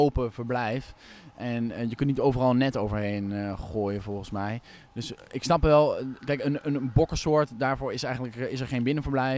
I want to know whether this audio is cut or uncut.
cut